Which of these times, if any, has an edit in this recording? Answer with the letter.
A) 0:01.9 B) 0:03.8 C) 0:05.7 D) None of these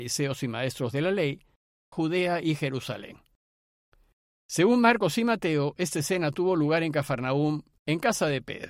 A